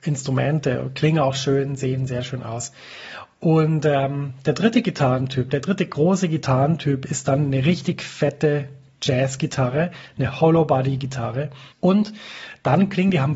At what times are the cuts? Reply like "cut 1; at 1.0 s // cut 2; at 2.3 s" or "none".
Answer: cut 1; at 11.7 s